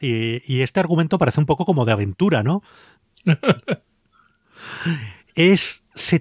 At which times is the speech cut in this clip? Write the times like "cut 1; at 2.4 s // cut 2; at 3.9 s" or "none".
cut 1; at 3.0 s

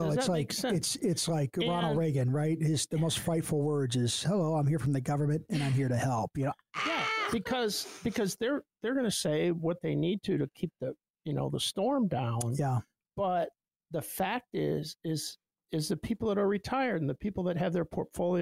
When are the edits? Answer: none

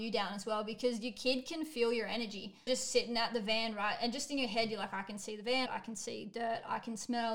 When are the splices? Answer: cut 1; at 2.7 s // cut 2; at 5.7 s

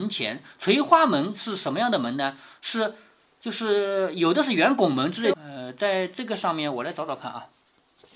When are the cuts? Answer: cut 1; at 5.3 s

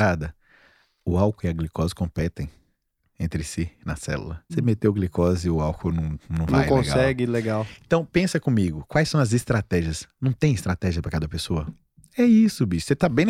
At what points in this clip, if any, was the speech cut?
cut 1; at 4.5 s

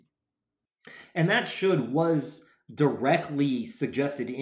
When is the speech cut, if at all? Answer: none

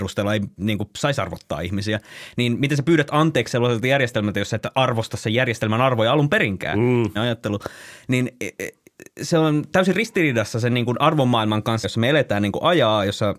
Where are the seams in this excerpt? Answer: cut 1; at 7.2 s // cut 2; at 11.8 s

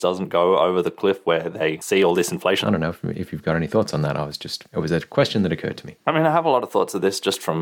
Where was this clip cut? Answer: cut 1; at 2.6 s

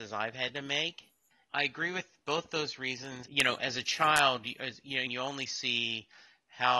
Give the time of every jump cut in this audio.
cut 1; at 1.5 s // cut 2; at 3.2 s // cut 3; at 5.1 s

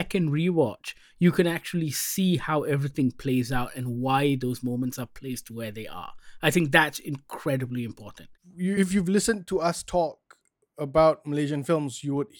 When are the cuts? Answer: none

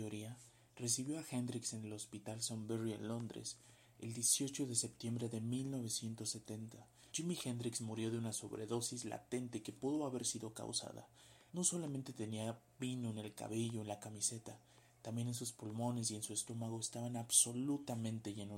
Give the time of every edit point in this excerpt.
cut 1; at 7.1 s // cut 2; at 11.5 s

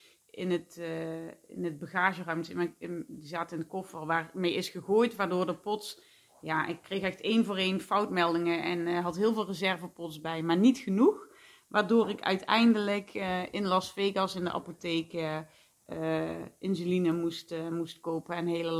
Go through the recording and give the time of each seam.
none

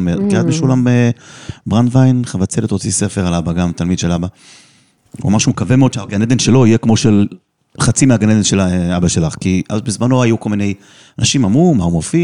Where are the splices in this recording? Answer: none

